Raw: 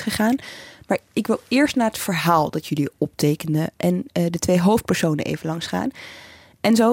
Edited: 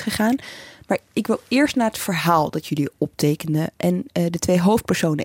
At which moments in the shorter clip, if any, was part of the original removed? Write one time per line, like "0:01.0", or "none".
none

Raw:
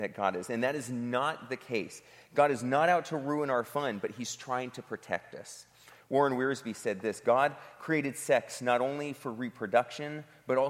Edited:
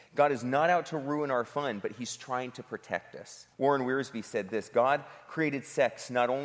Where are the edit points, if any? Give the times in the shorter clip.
0:03.5

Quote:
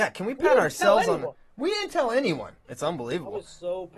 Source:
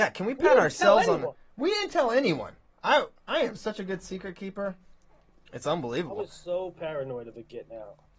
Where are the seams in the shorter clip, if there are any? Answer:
0:02.7

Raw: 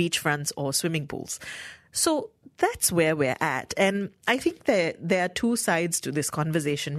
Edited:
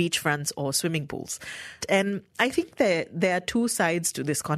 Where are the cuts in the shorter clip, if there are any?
0:01.8

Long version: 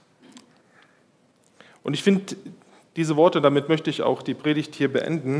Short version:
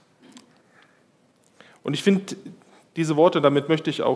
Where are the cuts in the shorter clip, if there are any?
none

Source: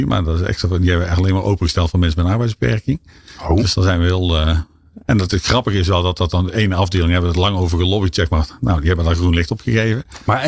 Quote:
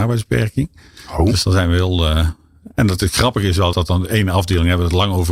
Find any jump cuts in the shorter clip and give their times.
0:03.7

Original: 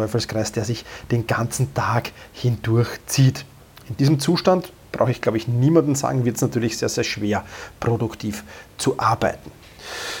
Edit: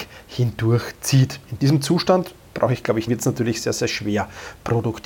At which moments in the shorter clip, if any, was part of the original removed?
0:01.4
0:03.1

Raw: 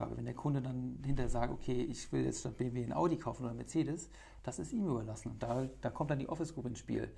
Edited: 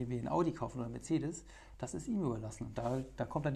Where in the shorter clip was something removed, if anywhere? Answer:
none

